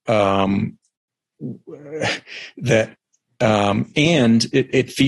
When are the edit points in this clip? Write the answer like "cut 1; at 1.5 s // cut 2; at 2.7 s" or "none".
none